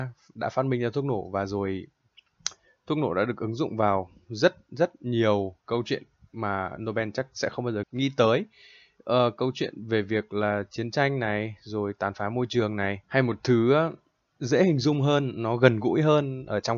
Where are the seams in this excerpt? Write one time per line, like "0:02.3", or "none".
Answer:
0:05.6
0:07.8
0:13.0